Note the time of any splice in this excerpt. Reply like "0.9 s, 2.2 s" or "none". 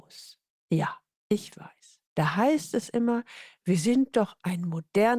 2.1 s